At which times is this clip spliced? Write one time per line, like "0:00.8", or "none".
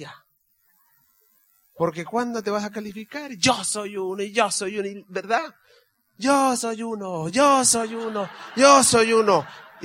none